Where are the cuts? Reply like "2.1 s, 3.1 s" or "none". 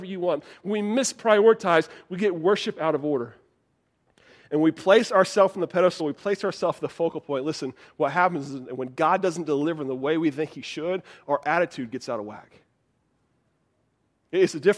none